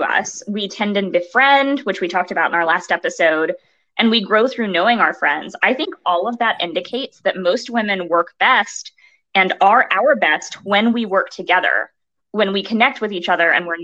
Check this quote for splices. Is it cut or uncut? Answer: uncut